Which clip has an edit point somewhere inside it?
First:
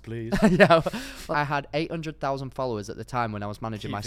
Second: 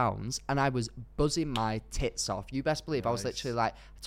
first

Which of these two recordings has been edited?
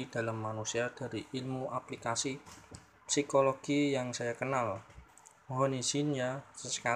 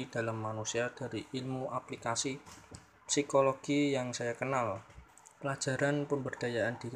second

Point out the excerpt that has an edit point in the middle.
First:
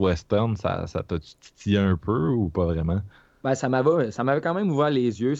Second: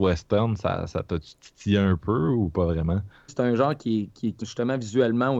second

